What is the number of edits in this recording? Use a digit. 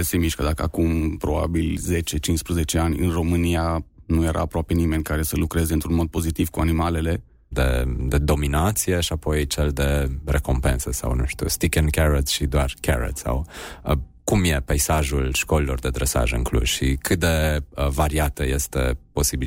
1